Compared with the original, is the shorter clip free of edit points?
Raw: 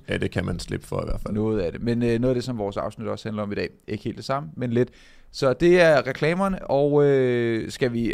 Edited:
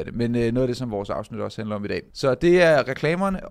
no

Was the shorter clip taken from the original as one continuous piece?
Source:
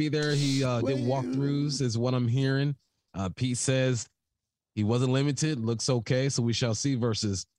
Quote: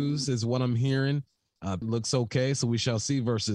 no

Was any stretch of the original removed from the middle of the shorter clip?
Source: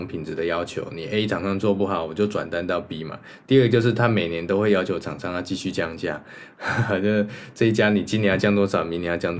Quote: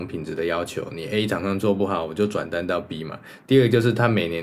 no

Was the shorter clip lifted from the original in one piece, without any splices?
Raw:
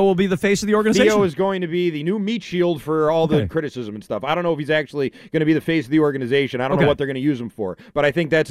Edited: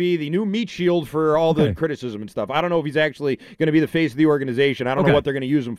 yes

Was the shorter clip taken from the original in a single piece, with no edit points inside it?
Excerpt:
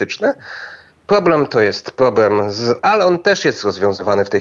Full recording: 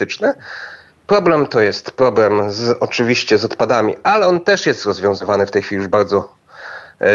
no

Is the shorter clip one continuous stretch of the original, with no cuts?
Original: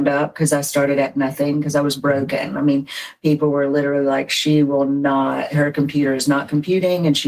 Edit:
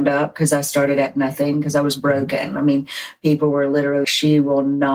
no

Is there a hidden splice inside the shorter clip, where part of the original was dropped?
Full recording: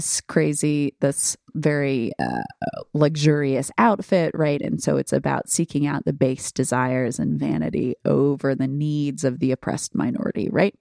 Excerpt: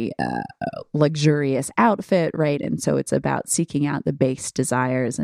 no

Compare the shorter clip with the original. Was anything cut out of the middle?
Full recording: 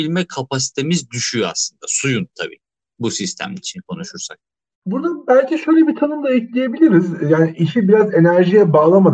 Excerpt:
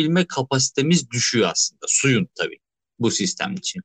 no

